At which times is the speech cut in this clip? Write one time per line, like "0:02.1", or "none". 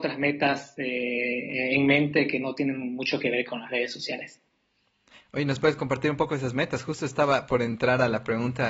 none